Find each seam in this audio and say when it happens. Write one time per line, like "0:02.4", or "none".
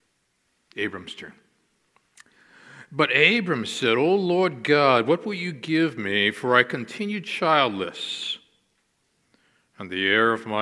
none